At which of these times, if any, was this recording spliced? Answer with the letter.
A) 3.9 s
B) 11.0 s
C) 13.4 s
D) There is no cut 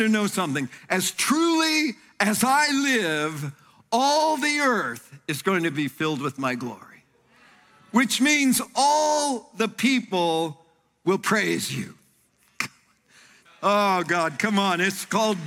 C